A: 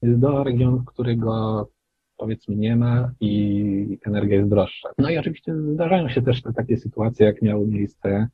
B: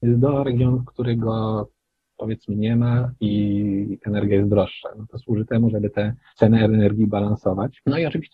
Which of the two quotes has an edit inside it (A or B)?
A